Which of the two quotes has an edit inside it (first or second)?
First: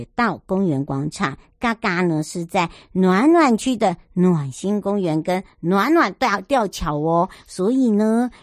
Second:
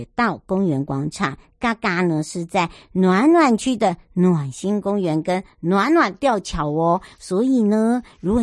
second